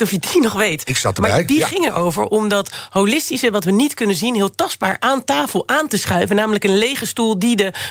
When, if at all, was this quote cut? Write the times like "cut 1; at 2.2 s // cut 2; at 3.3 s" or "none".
none